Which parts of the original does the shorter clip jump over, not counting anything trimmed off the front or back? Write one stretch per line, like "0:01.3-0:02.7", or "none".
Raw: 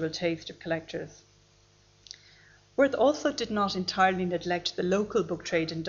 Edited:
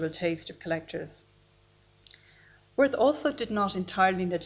none

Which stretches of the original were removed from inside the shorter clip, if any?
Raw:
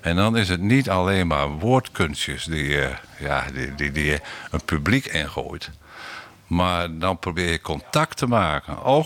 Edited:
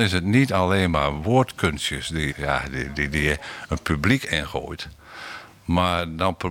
0:02.7-0:03.1

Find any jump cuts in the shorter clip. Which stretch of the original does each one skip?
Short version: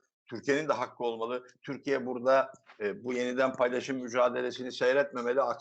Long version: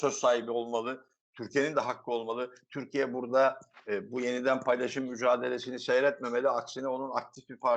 none

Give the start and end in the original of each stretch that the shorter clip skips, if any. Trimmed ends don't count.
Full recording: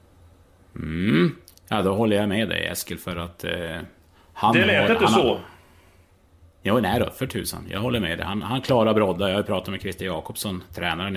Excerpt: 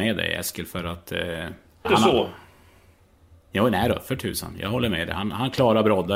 0:04.2-0:05.0

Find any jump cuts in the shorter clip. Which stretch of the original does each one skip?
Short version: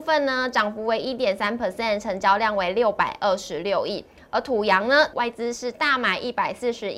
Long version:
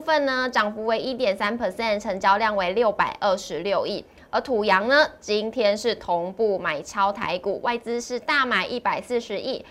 0:05.1-0:07.6

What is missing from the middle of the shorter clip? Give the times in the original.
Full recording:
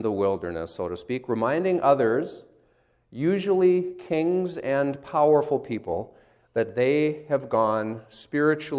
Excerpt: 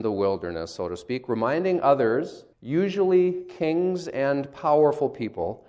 0:02.5-0:03.0

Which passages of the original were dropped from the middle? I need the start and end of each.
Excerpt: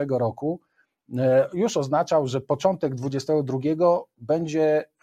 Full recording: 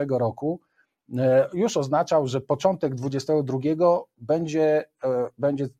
none

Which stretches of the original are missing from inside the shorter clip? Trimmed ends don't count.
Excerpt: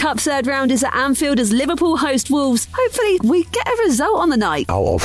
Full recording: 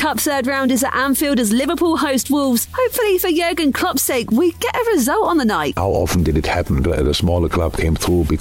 0:03.2-0:04.3

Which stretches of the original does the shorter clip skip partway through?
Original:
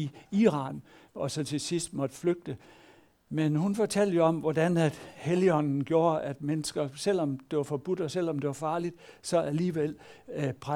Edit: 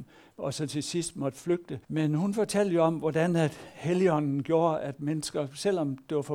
0:02.6-0:03.2

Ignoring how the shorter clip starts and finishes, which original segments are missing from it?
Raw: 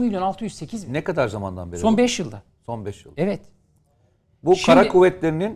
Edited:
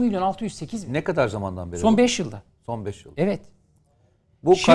none

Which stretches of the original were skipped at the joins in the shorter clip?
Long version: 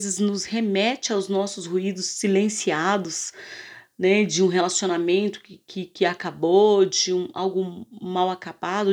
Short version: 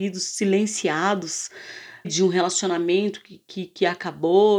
0:03.9-0:04.2

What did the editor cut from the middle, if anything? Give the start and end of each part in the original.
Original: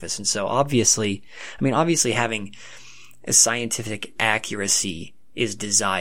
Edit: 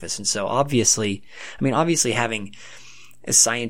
none

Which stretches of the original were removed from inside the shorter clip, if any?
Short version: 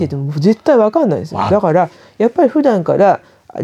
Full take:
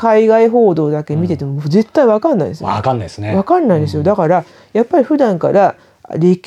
0:02.8-0:04.0

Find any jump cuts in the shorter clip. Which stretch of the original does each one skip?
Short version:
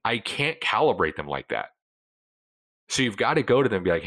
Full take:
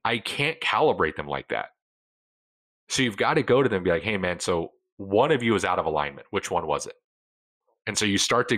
none

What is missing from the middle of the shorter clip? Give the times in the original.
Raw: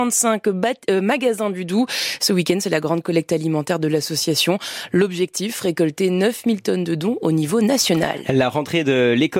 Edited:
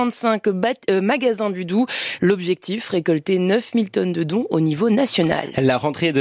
0:02.2-0:04.9

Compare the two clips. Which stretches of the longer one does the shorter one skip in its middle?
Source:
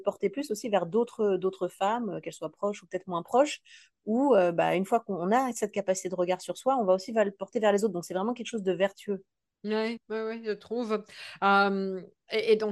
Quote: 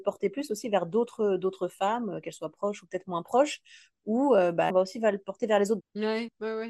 0:04.7-0:06.8
0:07.9-0:09.5

